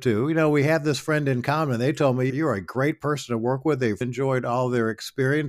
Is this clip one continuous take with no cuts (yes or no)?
no